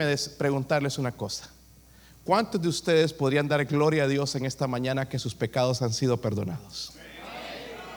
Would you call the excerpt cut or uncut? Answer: uncut